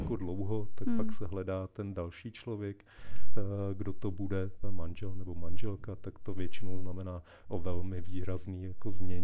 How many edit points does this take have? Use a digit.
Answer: 1